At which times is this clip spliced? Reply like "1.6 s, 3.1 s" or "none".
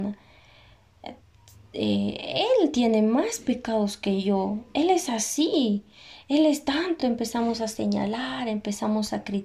none